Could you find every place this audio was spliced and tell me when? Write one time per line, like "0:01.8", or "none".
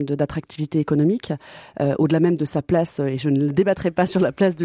none